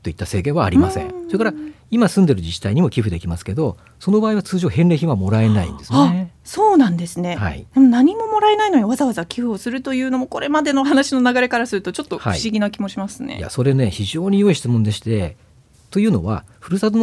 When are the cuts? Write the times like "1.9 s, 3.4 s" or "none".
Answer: none